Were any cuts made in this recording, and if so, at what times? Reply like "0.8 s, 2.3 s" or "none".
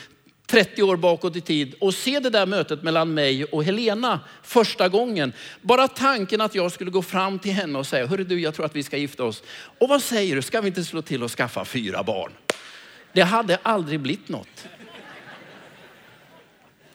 none